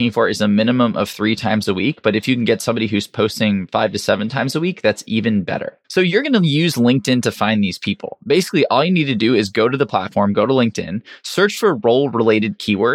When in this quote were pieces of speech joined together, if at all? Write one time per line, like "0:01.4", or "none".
0:05.8